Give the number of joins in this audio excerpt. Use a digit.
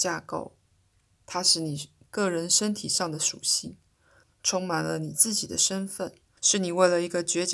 2